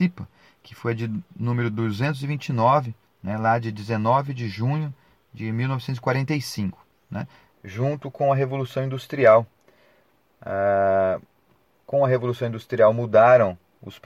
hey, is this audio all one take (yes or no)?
no